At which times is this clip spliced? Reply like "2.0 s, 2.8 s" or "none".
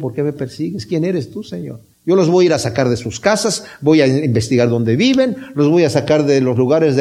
1.9 s